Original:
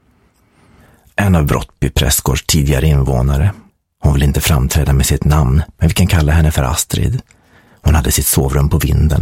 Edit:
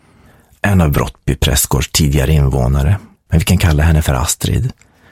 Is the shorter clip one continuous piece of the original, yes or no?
no